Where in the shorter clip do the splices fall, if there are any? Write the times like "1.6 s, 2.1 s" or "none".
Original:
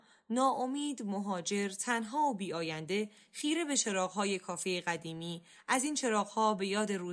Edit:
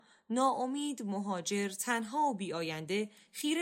none